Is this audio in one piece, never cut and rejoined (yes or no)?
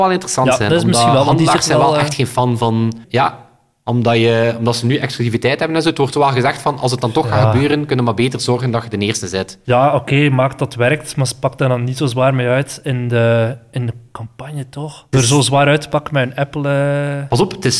no